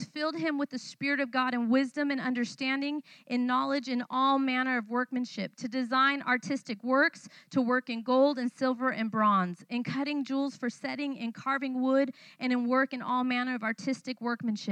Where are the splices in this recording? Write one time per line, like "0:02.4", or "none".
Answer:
none